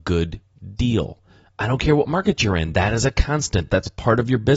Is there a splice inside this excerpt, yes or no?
no